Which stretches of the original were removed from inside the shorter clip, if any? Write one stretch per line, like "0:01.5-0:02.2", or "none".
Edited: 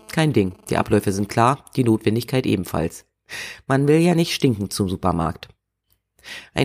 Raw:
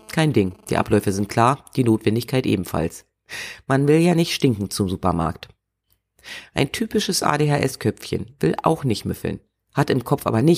none